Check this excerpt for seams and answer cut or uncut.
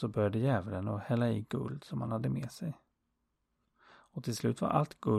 cut